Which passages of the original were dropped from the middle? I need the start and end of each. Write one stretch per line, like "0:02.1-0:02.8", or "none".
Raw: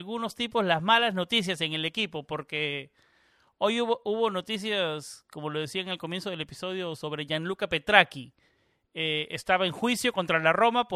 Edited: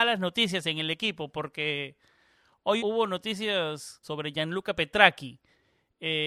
0:03.7-0:04.0
0:05.3-0:07.0